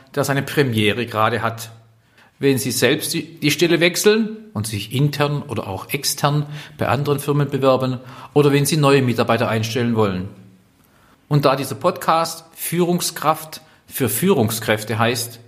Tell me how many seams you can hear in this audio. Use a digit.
1